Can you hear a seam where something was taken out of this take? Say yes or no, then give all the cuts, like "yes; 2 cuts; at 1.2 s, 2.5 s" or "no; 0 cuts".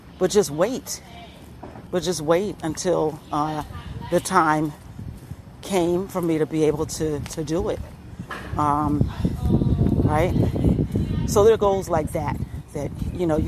yes; 1 cut; at 1.9 s